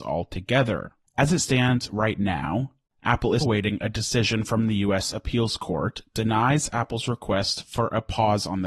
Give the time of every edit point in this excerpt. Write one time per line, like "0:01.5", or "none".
0:03.4
0:05.1